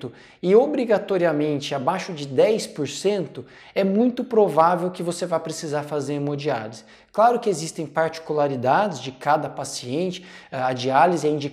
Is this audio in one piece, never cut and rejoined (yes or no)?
yes